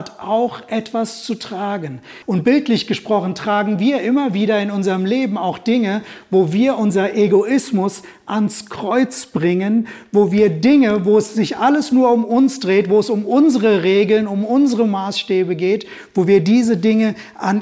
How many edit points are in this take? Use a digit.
1